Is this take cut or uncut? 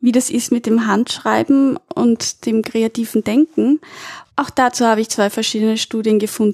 uncut